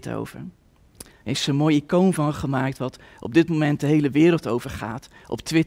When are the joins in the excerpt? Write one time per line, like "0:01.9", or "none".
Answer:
0:01.1